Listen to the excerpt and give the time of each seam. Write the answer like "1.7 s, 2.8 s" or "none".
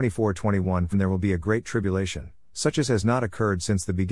0.9 s